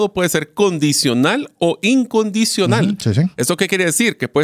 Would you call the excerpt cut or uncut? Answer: uncut